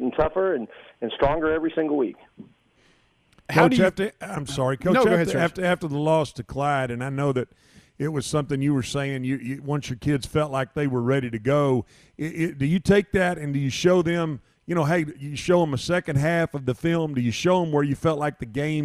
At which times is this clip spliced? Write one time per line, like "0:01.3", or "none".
none